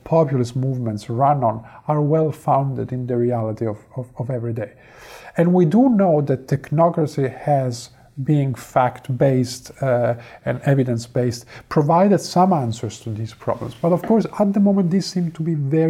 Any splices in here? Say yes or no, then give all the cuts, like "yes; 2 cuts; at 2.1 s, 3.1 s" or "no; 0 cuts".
no; 0 cuts